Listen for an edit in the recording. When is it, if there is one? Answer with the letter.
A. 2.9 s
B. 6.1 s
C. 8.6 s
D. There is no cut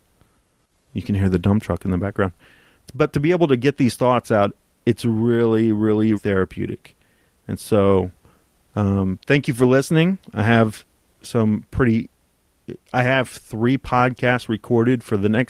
B